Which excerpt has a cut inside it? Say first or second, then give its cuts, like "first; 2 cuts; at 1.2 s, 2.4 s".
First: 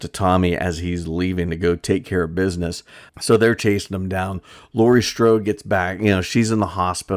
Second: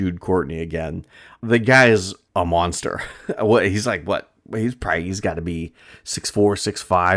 first; 1 cut; at 3.1 s